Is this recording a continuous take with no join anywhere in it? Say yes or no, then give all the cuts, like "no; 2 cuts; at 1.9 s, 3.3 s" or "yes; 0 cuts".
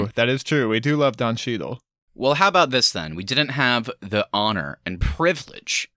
yes; 0 cuts